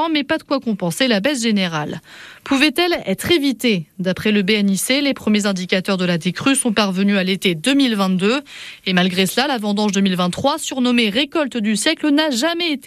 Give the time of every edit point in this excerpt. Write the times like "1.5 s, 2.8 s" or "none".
none